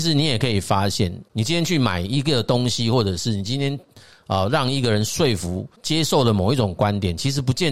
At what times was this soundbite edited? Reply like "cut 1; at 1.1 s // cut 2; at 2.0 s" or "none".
none

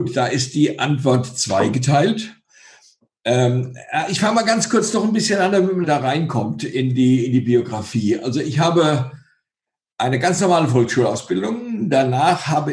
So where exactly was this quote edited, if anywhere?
cut 1; at 5.8 s

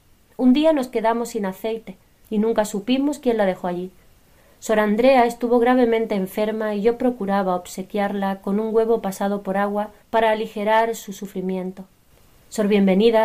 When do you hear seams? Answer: cut 1; at 2.2 s

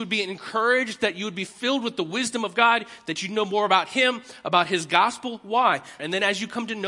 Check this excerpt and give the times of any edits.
cut 1; at 6.0 s

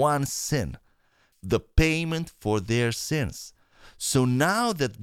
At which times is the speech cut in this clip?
cut 1; at 1.3 s

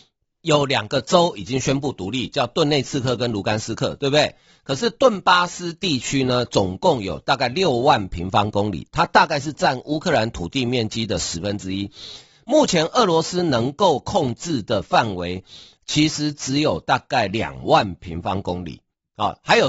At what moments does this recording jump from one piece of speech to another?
none

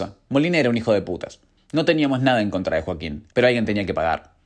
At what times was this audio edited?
cut 1; at 3.3 s

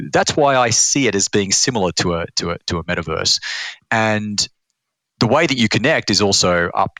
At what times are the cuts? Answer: none

